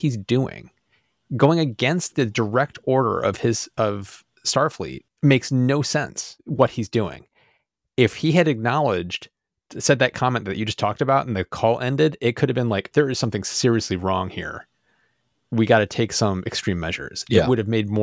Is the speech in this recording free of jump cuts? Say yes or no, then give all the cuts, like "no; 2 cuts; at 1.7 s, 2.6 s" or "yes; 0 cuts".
no; 1 cut; at 12.9 s